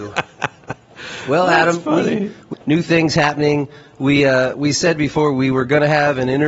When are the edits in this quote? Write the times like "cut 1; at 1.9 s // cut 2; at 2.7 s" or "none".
cut 1; at 2.5 s